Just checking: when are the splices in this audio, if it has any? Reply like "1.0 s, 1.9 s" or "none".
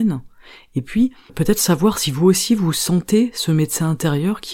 1.3 s